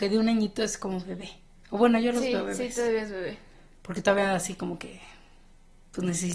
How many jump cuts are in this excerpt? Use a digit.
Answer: 0